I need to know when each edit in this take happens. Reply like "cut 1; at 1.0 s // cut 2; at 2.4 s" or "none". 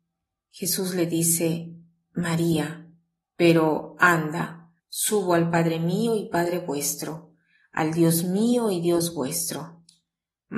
cut 1; at 3.2 s // cut 2; at 4.8 s